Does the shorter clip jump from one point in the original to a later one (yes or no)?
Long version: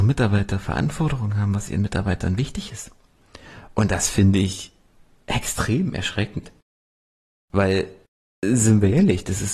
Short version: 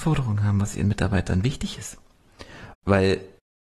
yes